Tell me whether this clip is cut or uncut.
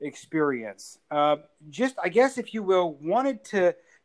uncut